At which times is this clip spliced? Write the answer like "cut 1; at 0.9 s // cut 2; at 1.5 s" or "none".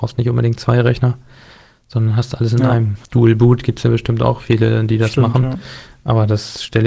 cut 1; at 3.0 s